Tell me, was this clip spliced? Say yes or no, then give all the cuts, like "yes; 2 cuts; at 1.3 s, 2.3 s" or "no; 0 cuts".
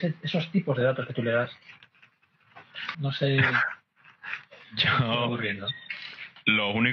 yes; 1 cut; at 2.9 s